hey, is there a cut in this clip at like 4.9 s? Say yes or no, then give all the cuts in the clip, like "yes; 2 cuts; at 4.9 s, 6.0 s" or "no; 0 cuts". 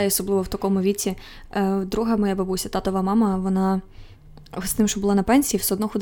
no; 0 cuts